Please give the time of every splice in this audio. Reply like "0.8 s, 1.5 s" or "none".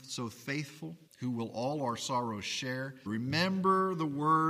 1.1 s, 3.1 s